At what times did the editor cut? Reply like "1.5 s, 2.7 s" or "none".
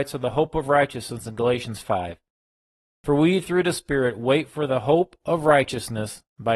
1.8 s